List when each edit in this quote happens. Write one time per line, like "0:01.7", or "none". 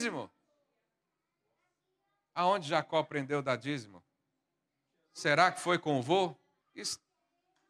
0:06.6